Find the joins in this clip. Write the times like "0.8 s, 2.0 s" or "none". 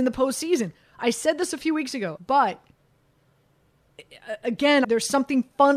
2.2 s, 4.8 s